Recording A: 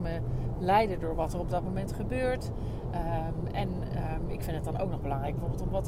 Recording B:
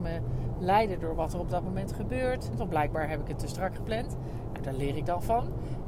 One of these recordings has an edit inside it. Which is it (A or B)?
B